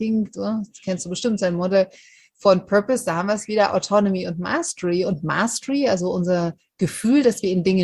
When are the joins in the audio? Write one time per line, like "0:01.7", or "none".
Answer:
none